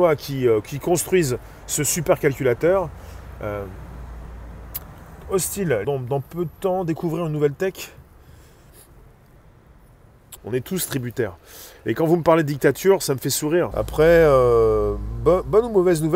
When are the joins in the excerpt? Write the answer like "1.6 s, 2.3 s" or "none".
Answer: 5.8 s, 10.4 s, 13.7 s